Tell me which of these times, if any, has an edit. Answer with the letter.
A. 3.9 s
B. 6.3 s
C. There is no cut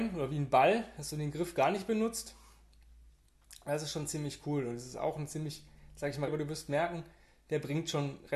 B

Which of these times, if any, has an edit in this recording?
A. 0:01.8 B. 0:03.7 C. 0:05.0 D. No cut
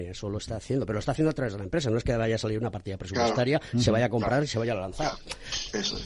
D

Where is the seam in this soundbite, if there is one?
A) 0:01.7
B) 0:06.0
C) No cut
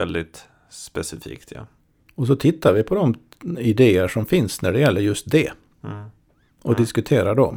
C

